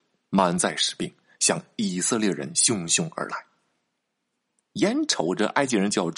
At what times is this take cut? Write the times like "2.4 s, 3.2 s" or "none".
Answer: none